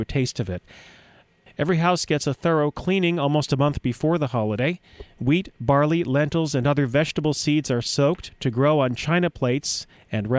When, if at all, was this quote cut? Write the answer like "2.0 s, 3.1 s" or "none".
1.5 s